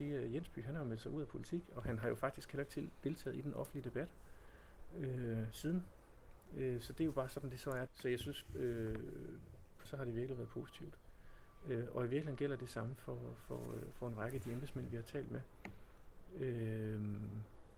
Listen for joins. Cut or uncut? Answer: cut